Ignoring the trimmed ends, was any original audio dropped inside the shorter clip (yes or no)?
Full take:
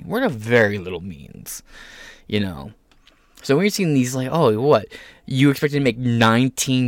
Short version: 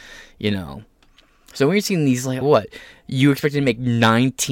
yes